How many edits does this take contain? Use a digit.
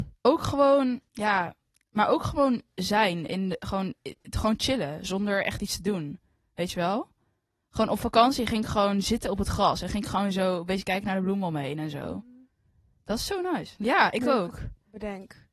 2